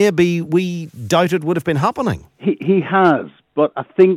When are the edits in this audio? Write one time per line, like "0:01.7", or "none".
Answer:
0:02.3